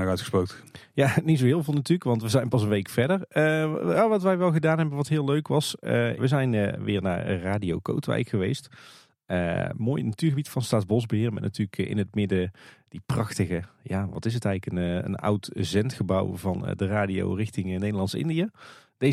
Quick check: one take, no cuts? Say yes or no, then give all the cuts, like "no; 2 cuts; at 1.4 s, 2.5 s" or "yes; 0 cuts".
no; 1 cut; at 6.2 s